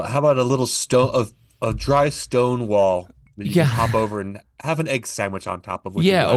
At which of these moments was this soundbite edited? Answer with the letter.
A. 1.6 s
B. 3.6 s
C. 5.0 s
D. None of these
D